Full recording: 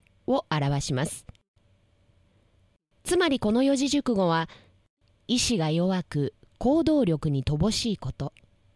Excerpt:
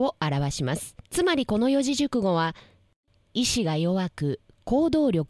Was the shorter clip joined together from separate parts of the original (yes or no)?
yes